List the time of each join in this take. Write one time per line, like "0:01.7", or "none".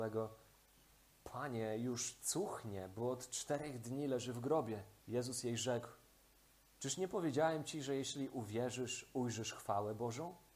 0:05.0